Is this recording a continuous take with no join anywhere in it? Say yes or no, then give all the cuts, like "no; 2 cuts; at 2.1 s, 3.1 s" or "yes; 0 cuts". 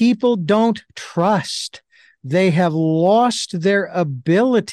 yes; 0 cuts